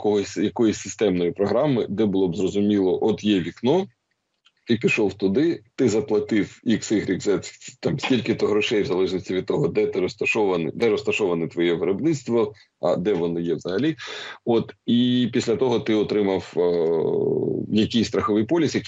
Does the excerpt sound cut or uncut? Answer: uncut